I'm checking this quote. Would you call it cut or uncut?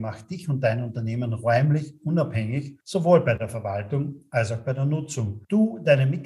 uncut